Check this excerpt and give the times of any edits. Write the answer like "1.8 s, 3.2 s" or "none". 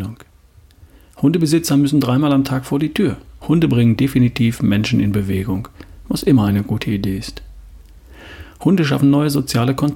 3.4 s